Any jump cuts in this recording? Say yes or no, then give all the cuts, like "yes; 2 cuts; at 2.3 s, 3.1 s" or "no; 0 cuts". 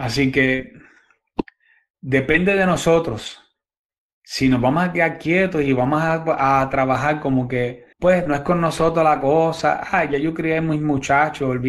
yes; 1 cut; at 7.9 s